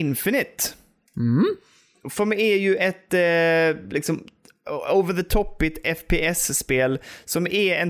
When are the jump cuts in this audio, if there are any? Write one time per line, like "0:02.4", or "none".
none